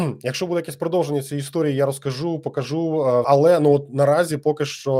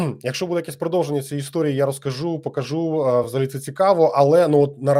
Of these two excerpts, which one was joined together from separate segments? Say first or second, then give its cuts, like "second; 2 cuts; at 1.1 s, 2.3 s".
first; 1 cut; at 3.2 s